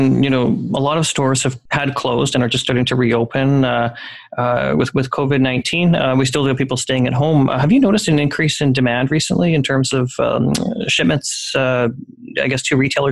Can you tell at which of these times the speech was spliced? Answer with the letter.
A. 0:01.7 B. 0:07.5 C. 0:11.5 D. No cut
A